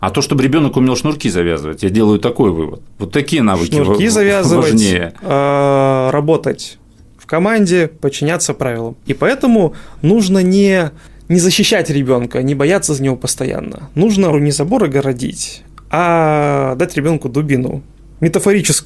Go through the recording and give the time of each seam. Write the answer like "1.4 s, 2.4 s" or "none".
9.1 s, 14.3 s